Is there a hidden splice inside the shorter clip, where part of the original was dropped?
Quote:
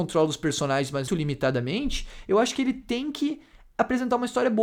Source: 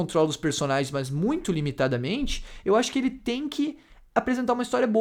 yes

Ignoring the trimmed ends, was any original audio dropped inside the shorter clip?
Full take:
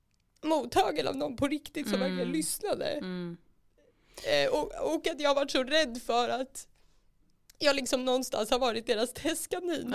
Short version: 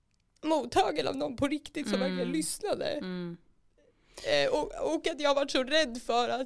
no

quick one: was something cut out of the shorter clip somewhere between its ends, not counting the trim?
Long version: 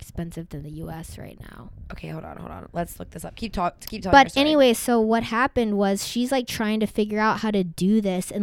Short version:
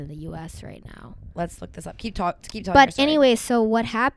yes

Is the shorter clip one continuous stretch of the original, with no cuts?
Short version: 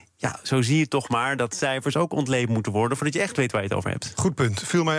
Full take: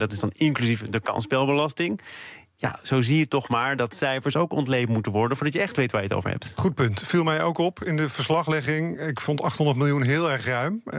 yes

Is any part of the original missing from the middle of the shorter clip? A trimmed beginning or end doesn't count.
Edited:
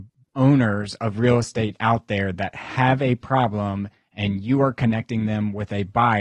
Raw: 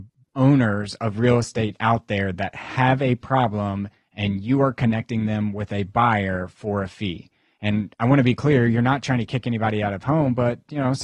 no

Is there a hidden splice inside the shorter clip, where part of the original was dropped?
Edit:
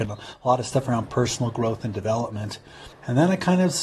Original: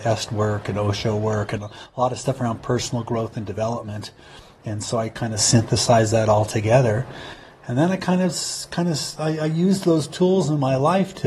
yes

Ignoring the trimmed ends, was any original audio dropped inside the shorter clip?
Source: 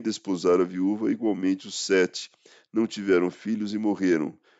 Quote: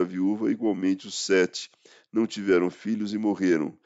no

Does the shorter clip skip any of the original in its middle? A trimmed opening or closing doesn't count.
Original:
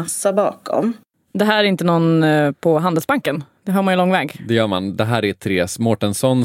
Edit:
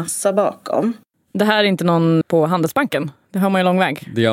yes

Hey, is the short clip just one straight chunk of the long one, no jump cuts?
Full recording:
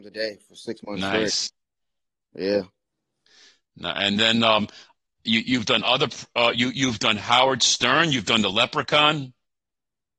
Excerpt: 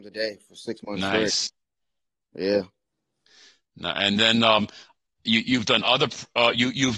yes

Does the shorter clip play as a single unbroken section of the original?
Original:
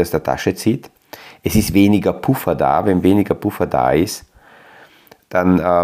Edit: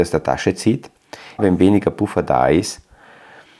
no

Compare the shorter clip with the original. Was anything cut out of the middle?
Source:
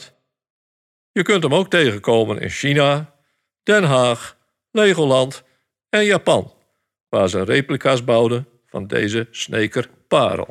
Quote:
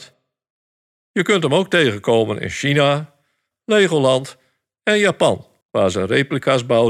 yes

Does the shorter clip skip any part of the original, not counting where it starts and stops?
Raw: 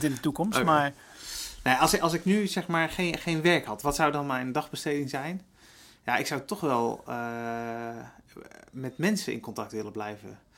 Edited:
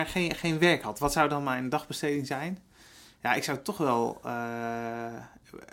no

